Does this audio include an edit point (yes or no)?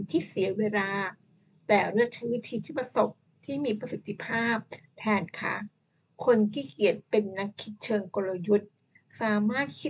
no